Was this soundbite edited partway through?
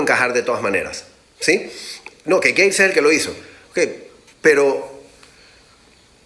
yes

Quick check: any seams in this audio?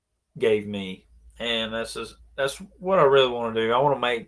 no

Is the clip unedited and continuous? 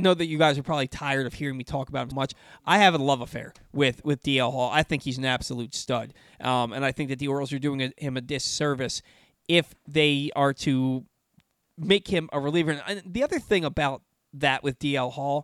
no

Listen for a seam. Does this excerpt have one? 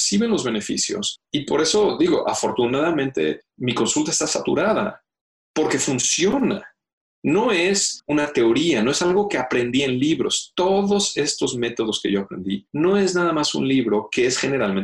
no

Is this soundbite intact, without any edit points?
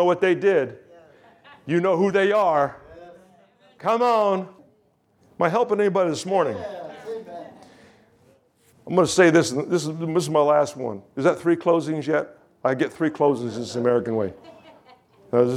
no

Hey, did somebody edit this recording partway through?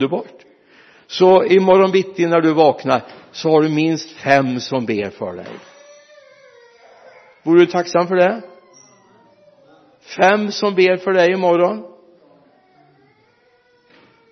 no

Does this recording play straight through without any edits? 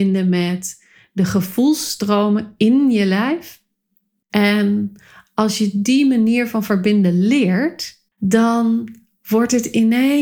no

